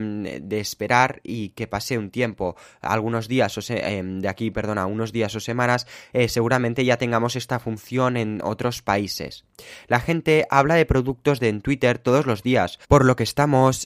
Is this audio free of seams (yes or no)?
no